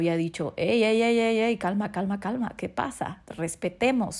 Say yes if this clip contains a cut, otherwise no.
no